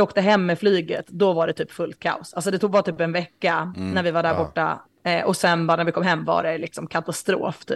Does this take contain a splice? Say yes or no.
no